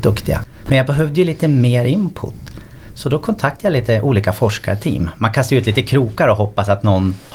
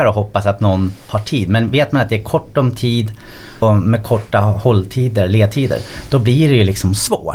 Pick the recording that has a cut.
second; 1 cut; at 3.6 s

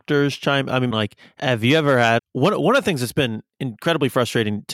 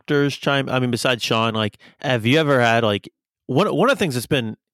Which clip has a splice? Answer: first; 2 cuts; at 0.9 s, 2.2 s

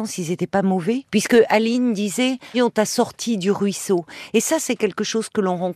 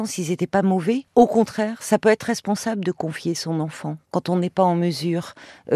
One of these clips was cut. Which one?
first; 2 cuts; at 1.1 s, 2.5 s

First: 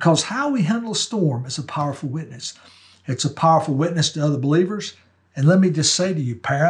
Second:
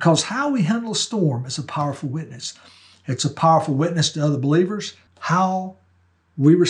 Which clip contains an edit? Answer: second; 1 cut; at 5.1 s

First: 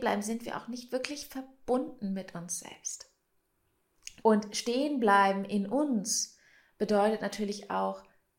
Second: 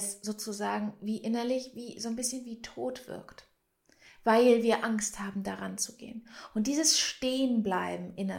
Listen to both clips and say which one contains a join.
first; 1 cut; at 4.2 s

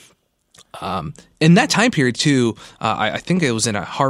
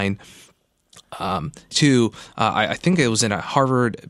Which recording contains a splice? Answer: second; 1 cut; at 1.7 s

